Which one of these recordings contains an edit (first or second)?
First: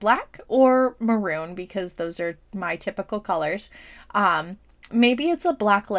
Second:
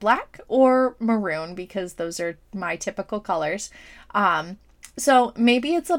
first